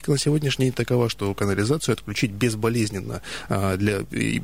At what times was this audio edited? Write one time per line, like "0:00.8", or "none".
none